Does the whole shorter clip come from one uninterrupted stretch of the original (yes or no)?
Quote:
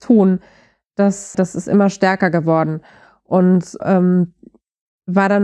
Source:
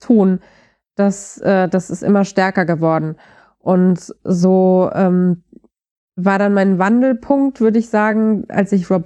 no